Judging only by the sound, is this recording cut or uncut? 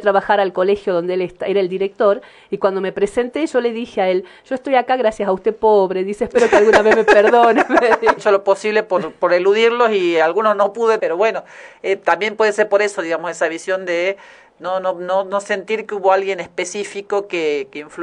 cut